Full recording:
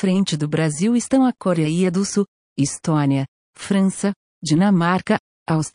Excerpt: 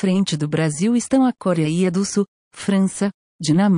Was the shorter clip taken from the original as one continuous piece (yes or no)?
no